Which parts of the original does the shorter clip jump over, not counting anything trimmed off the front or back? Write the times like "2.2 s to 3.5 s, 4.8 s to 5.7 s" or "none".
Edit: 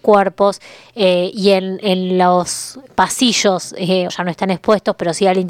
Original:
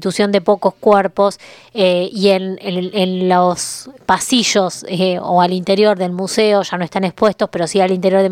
2.6 s to 2.9 s, 5.2 s to 6.6 s